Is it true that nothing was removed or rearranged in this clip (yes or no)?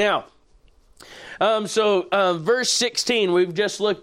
yes